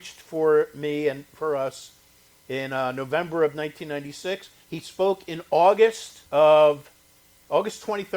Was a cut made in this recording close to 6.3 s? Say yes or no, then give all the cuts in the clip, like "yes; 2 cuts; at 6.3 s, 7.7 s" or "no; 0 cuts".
yes; 2 cuts; at 4.6 s, 6.3 s